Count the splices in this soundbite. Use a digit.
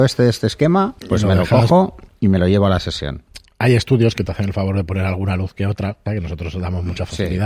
2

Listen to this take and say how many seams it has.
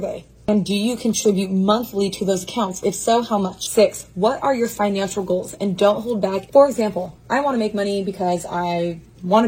1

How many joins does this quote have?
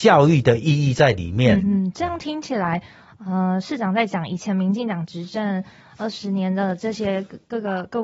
1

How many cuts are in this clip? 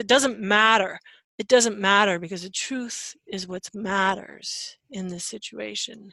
1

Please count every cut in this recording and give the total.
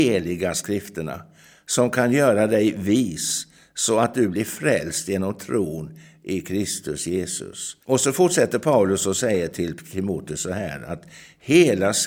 1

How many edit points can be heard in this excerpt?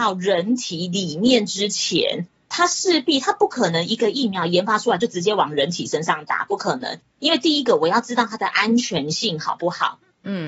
0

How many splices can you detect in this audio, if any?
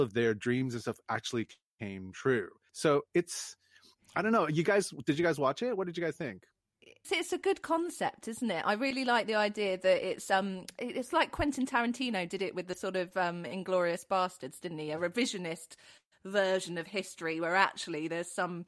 1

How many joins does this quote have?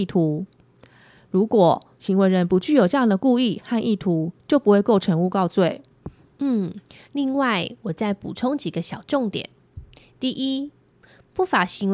0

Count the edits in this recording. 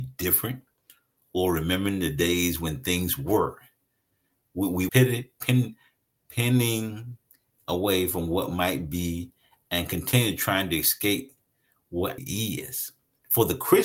2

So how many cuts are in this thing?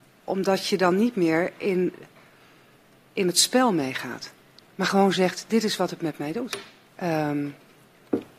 1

